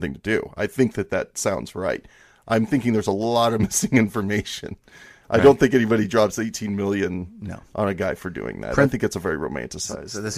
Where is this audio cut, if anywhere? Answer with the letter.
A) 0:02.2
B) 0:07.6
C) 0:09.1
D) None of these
D